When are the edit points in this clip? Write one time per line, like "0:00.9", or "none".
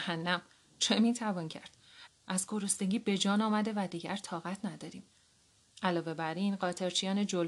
0:02.1
0:05.6